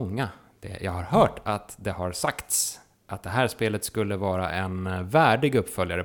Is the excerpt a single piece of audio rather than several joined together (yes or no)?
yes